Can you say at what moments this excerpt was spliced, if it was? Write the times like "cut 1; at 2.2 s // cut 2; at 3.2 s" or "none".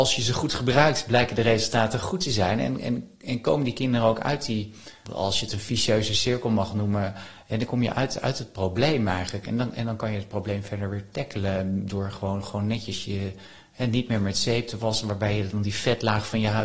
cut 1; at 5.1 s